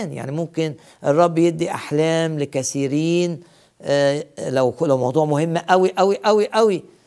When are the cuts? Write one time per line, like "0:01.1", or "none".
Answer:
none

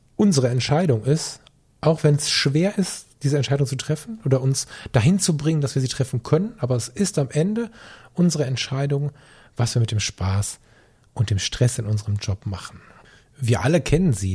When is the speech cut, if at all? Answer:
none

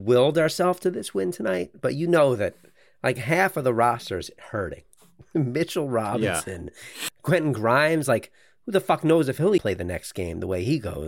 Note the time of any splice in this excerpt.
0:07.1
0:09.6

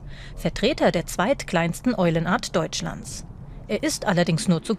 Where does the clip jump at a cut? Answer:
none

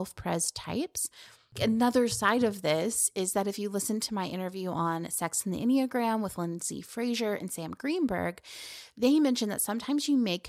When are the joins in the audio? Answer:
none

